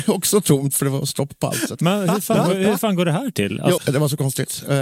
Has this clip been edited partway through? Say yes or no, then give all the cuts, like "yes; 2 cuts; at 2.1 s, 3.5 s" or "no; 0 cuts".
yes; 1 cut; at 3.8 s